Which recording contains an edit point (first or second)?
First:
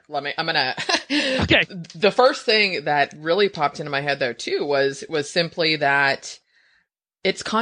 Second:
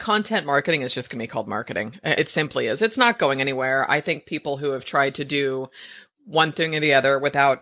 second